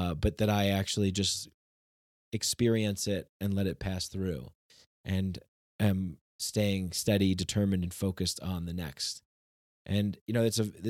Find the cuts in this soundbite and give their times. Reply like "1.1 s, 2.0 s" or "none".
none